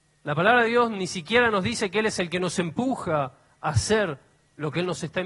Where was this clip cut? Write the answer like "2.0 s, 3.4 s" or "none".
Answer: none